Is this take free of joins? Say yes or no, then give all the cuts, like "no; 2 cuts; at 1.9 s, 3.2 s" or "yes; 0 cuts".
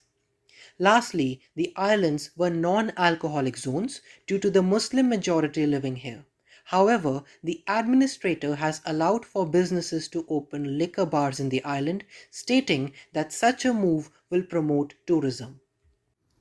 yes; 0 cuts